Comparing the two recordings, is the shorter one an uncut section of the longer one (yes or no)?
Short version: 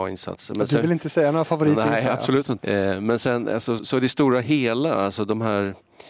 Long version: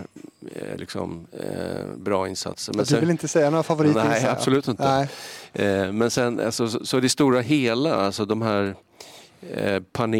no